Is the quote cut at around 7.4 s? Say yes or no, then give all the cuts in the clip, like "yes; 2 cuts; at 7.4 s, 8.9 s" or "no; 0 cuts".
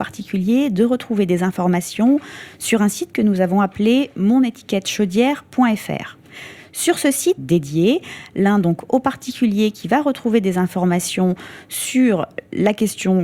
yes; 1 cut; at 7.4 s